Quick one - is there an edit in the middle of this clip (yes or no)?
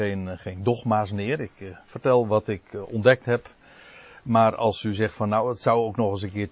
no